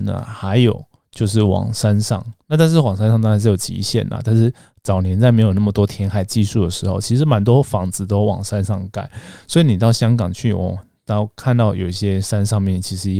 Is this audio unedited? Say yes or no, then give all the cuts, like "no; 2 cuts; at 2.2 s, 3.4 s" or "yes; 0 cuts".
yes; 0 cuts